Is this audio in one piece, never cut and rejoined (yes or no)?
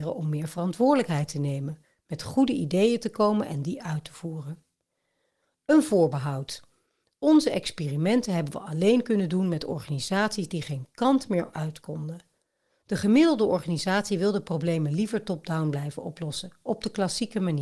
yes